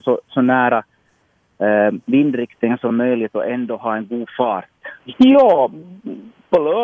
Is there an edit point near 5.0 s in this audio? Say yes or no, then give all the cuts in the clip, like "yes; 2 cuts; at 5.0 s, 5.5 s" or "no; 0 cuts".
yes; 1 cut; at 5.0 s